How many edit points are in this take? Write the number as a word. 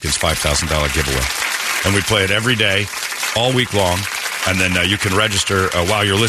zero